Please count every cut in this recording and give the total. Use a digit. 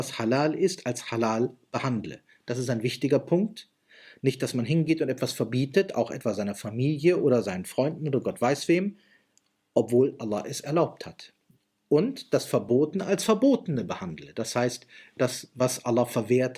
0